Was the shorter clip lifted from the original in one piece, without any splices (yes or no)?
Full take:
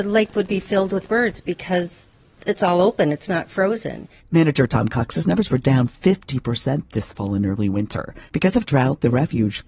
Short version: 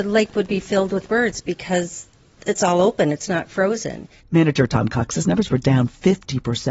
yes